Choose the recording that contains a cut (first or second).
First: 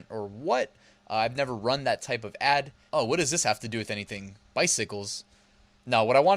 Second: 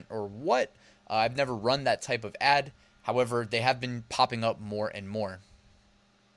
first